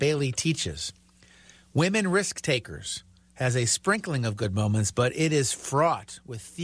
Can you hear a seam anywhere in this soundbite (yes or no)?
no